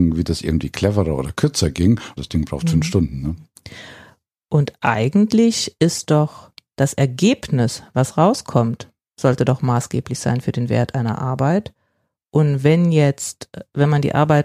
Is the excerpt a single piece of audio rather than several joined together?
no; 1 cut; at 2.2 s

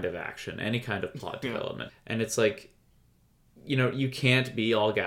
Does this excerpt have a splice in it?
yes; 1 cut; at 1.9 s

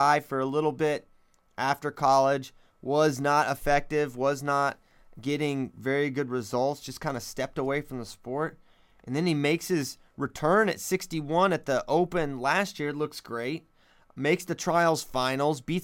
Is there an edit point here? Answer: no; 0 cuts

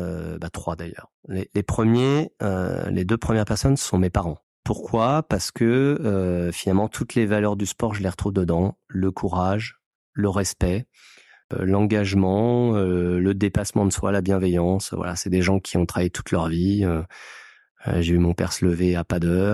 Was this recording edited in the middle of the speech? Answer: no; 0 cuts

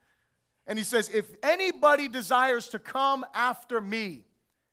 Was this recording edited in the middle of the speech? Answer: no; 0 cuts

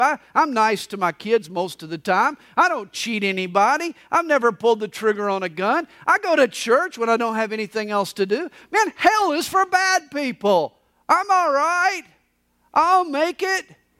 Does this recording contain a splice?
no; 0 cuts

